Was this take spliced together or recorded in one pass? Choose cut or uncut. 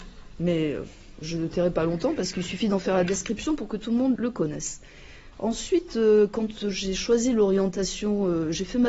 cut